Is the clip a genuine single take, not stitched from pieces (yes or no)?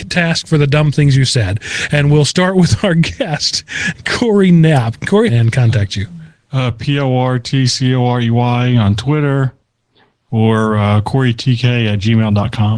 no